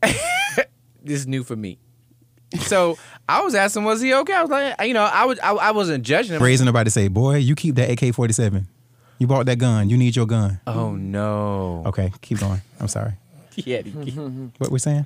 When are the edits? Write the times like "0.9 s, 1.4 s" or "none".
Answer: 6.4 s